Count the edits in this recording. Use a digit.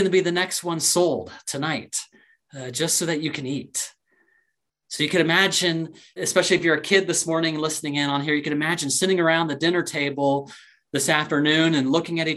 2